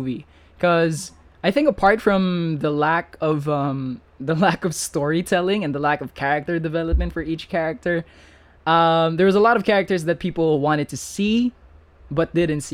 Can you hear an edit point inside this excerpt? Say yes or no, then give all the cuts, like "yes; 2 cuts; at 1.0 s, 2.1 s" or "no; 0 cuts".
no; 0 cuts